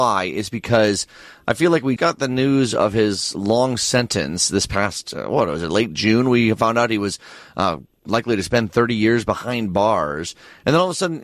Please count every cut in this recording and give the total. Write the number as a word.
one